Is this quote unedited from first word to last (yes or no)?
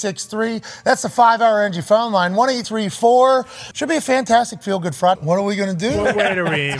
no